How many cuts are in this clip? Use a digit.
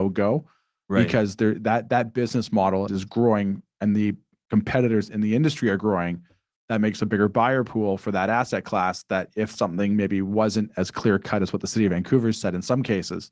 1